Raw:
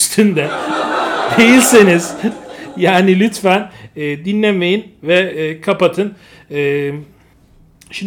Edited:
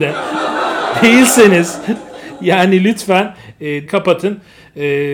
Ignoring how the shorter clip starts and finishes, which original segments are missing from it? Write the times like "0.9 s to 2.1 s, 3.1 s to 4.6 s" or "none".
4.2 s to 5.6 s